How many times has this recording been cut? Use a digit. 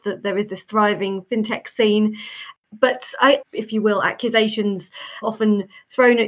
2